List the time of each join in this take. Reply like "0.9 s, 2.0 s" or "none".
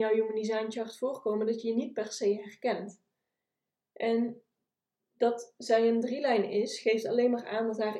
none